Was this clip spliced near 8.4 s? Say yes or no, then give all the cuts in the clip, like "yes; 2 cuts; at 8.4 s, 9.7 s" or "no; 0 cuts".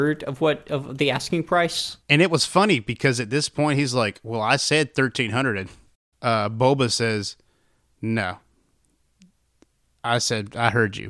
no; 0 cuts